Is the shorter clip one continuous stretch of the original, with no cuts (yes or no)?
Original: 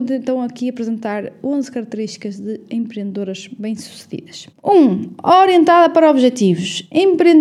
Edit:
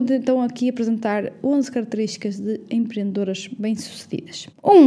yes